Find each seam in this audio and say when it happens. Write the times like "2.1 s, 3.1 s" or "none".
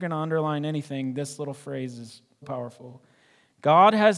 2.4 s